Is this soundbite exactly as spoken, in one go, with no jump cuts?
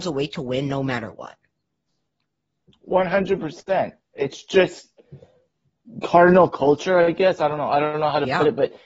yes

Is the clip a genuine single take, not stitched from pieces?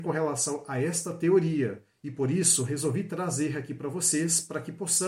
yes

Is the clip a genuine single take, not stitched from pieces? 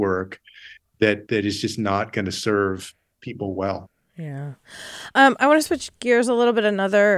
yes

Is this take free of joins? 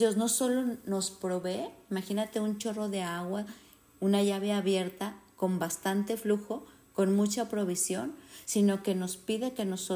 yes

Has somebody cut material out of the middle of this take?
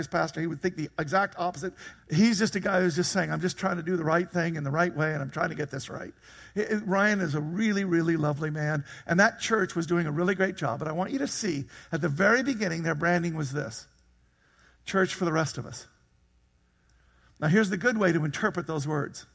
yes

